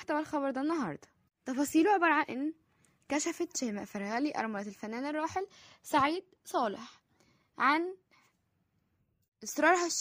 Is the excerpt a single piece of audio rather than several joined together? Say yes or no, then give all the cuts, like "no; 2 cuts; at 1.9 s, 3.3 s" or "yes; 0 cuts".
yes; 0 cuts